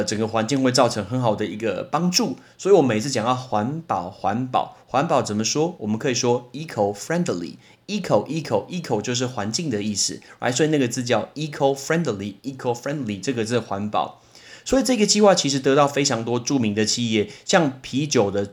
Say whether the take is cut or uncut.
uncut